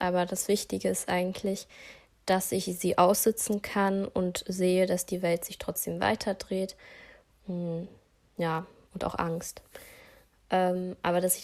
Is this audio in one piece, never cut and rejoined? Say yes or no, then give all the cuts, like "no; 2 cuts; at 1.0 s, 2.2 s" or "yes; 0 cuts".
no; 1 cut; at 7.4 s